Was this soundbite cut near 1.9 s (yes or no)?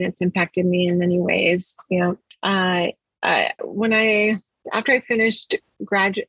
no